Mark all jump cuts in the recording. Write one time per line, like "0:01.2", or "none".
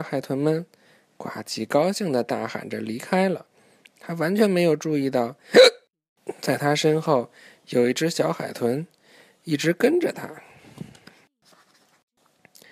none